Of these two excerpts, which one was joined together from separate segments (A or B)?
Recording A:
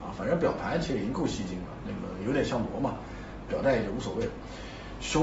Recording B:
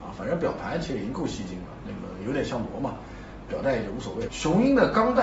B